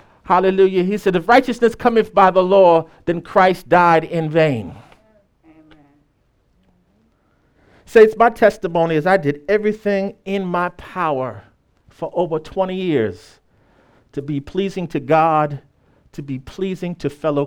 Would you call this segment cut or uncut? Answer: uncut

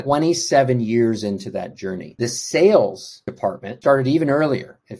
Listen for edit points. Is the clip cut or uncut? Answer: uncut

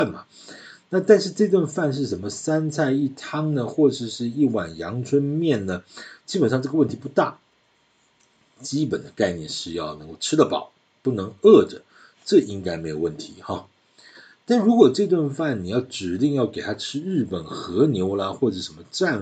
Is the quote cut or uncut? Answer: uncut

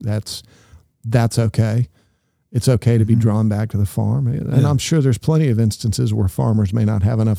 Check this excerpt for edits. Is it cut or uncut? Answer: uncut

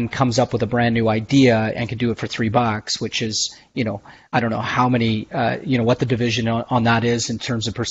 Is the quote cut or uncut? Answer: uncut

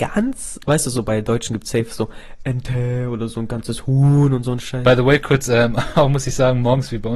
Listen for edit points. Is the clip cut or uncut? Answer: uncut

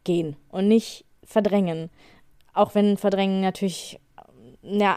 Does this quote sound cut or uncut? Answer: uncut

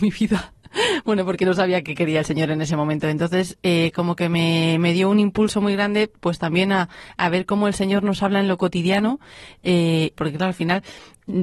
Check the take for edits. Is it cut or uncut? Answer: cut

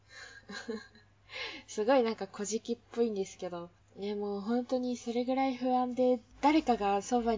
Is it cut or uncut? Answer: cut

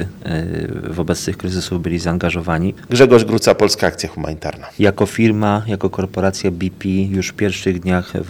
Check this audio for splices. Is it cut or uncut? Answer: cut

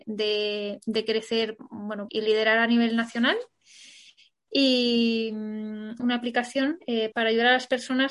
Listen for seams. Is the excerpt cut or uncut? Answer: cut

